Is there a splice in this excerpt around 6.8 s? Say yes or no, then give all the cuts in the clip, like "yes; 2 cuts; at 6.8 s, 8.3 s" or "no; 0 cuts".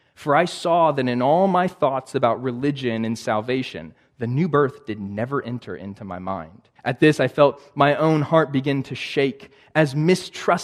yes; 1 cut; at 6.8 s